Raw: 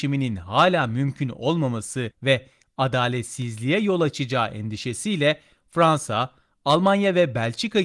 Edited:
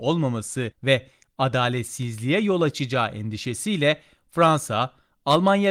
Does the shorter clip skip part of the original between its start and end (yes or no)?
no